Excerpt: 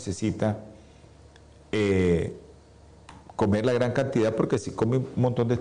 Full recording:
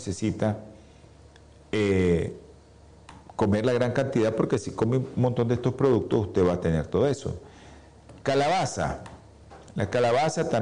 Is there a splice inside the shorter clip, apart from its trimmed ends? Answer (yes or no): no